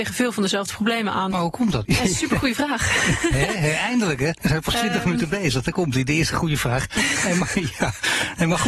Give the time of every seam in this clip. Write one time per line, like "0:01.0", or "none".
0:01.8